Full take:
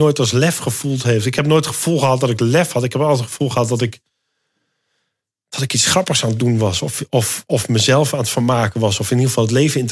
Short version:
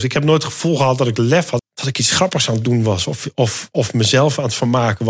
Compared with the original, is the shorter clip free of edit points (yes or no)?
no